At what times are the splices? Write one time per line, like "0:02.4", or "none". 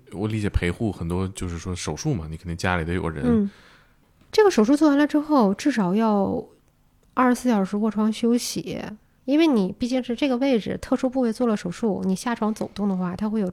none